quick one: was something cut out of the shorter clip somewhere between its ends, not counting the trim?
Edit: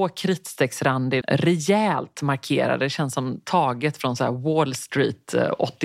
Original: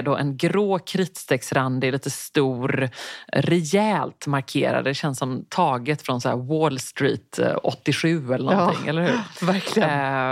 yes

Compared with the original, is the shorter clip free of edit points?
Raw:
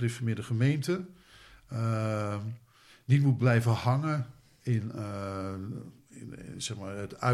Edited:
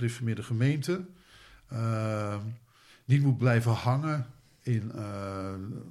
yes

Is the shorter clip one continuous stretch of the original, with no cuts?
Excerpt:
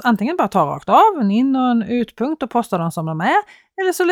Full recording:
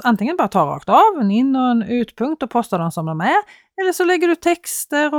yes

